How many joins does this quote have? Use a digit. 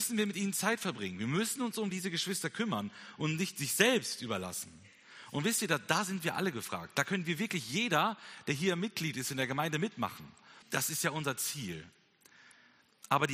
1